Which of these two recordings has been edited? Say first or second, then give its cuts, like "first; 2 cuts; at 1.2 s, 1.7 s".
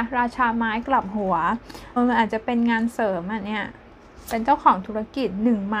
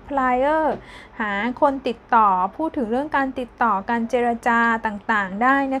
first; 1 cut; at 2.0 s